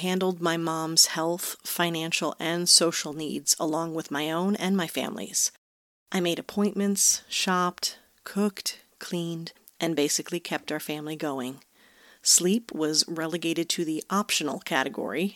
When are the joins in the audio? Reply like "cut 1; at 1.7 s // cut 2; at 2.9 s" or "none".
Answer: none